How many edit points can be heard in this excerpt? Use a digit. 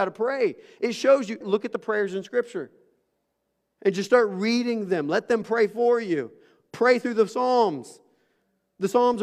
1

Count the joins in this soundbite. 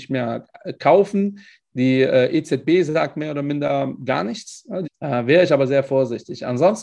1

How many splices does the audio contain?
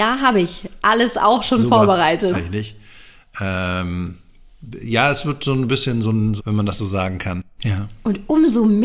3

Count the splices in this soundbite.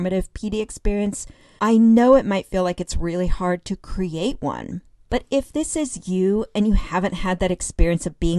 1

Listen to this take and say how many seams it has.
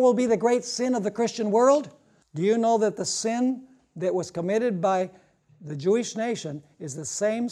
1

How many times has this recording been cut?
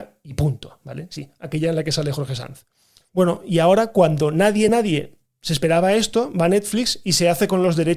2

